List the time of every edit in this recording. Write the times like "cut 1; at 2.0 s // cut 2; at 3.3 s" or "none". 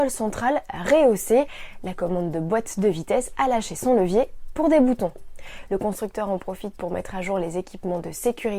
cut 1; at 5.7 s